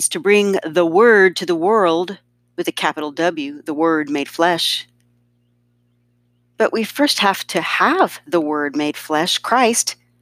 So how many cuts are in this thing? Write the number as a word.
zero